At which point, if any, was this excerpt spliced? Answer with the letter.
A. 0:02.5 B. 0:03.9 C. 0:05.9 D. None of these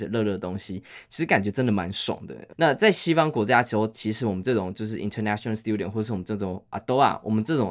A